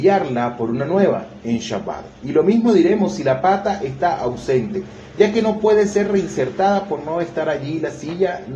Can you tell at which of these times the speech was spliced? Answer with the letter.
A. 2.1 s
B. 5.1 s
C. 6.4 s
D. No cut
D